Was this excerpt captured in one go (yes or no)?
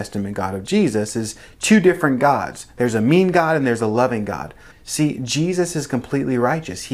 no